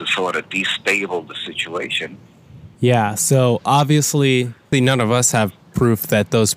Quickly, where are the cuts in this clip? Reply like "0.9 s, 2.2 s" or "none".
2.7 s, 4.7 s

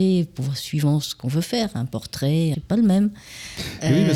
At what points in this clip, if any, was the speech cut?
2.5 s

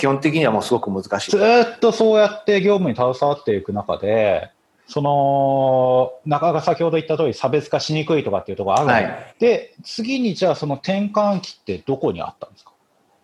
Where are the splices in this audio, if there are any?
1.3 s, 9.3 s

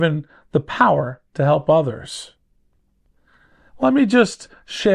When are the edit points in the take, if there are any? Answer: 3.7 s

